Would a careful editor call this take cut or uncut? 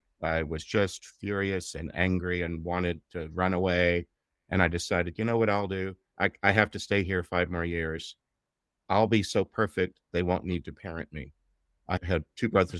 uncut